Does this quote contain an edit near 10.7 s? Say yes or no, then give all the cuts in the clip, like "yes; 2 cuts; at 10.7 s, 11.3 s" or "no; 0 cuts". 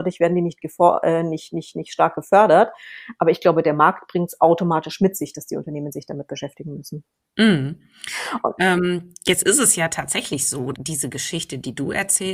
yes; 1 cut; at 10.7 s